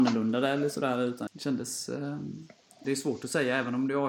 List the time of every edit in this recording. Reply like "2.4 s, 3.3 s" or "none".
1.3 s, 2.8 s